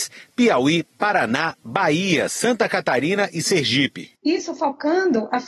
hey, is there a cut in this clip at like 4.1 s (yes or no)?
yes